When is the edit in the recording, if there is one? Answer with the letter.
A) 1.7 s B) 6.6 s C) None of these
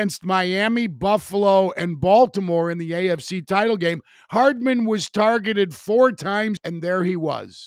B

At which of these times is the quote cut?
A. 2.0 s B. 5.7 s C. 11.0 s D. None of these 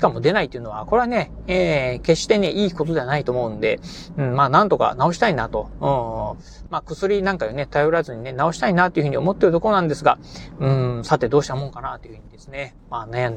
D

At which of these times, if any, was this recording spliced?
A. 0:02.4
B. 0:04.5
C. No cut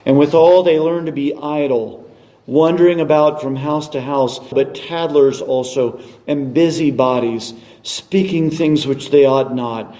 B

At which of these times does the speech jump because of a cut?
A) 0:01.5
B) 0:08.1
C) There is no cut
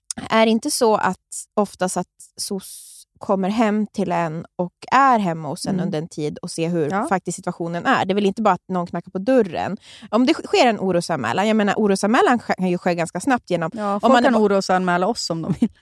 A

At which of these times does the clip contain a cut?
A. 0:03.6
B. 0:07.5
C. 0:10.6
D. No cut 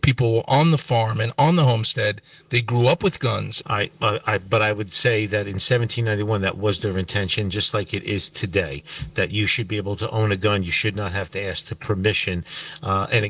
A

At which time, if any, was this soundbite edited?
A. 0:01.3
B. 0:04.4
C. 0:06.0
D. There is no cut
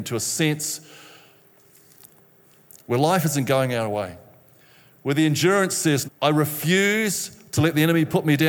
C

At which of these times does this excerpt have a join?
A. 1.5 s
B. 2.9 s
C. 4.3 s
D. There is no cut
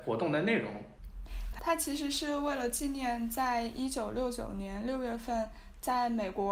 A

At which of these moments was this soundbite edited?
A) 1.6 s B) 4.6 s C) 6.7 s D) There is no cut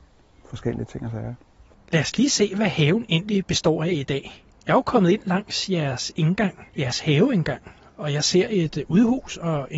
C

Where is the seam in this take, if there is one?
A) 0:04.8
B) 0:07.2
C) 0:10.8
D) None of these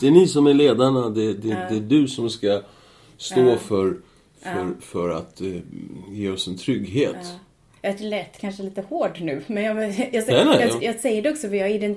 C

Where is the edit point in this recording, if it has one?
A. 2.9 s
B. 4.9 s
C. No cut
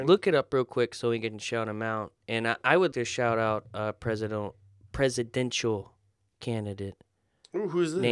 A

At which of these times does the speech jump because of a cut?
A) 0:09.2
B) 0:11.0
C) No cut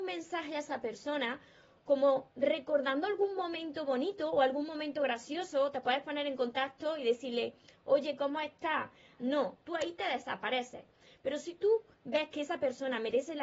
A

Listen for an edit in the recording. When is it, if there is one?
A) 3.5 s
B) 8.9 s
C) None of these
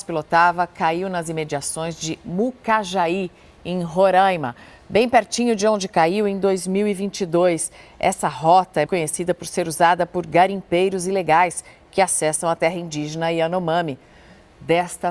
B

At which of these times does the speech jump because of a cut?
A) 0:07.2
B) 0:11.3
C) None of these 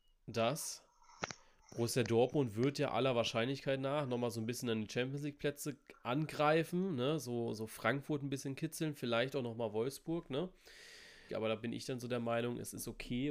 B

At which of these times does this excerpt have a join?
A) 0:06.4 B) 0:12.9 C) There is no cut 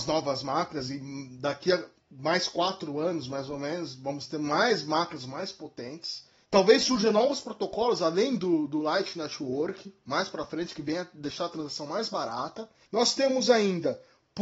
B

